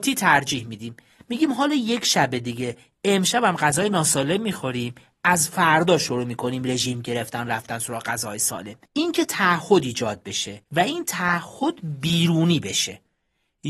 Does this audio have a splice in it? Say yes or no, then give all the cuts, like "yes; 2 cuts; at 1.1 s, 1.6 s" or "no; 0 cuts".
yes; 2 cuts; at 8.9 s, 10.6 s